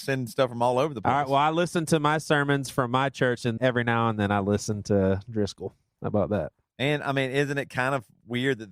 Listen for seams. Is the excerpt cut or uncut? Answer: cut